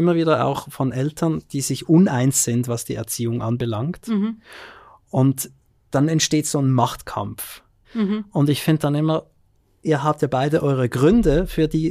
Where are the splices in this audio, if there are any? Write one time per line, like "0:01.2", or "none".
0:07.8